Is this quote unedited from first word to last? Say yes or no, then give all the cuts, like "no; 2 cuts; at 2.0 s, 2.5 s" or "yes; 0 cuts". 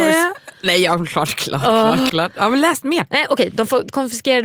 no; 1 cut; at 2.1 s